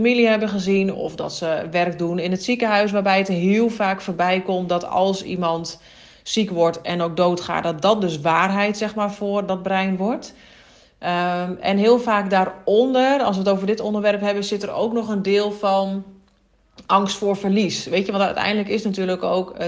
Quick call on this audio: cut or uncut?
uncut